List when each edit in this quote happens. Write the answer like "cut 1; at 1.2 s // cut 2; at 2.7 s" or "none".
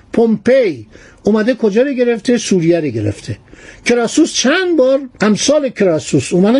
cut 1; at 5.1 s